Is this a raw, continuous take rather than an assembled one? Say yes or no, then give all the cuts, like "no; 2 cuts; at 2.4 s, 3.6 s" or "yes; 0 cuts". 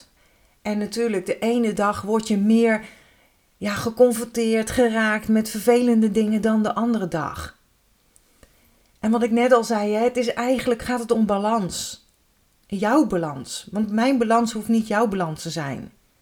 yes; 0 cuts